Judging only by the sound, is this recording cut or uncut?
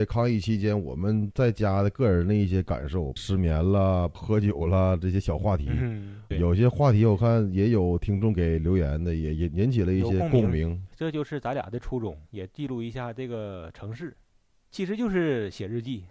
cut